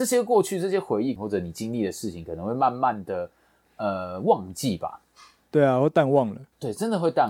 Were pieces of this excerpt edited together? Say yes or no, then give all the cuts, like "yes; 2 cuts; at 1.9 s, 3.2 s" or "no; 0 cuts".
yes; 1 cut; at 1.2 s